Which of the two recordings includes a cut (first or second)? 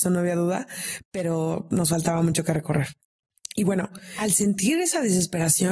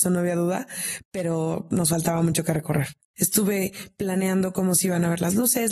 second